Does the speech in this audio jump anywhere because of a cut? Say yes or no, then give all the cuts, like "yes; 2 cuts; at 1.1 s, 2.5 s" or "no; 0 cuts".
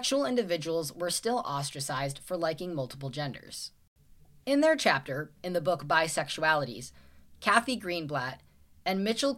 yes; 2 cuts; at 5.4 s, 7.4 s